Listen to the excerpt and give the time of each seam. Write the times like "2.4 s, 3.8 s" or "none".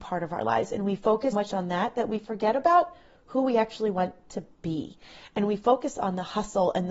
1.3 s